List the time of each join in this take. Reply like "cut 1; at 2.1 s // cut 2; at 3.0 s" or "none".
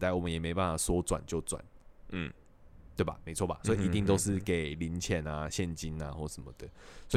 none